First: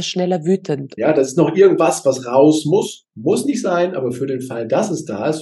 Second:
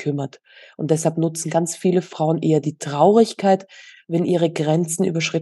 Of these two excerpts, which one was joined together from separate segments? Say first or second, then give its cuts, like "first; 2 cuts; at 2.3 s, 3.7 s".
first; 1 cut; at 1.0 s